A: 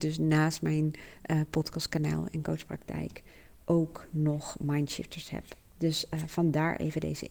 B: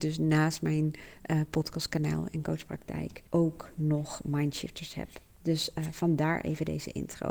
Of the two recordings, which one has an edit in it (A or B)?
B